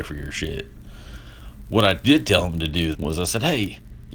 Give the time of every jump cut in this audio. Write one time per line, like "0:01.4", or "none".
0:02.9